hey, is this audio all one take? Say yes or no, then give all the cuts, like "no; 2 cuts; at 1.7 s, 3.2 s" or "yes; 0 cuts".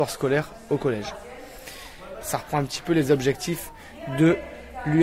no; 1 cut; at 2.2 s